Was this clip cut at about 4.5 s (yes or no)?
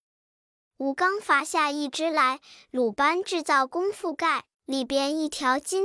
yes